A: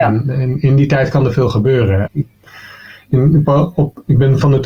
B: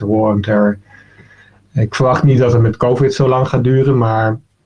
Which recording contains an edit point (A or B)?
A